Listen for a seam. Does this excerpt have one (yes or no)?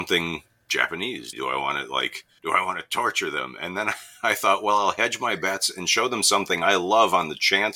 yes